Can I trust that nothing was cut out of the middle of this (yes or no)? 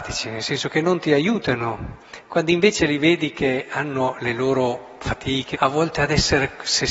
no